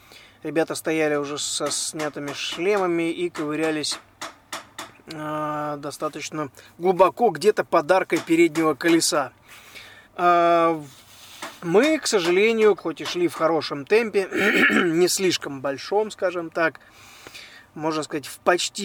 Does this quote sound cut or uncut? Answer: cut